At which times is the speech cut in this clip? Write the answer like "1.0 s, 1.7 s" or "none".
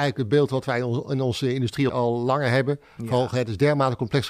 1.9 s